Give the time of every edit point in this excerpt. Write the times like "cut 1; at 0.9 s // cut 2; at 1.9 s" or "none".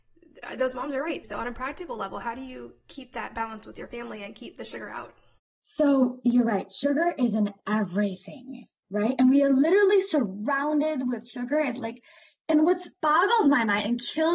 cut 1; at 1.2 s